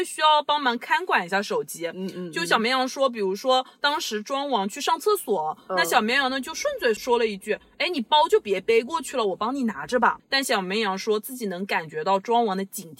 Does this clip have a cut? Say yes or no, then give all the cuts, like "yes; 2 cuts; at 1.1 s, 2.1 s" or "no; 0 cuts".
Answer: yes; 2 cuts; at 7.0 s, 10.2 s